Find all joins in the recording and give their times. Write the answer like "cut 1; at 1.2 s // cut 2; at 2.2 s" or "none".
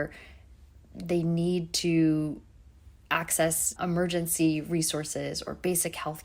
cut 1; at 3.8 s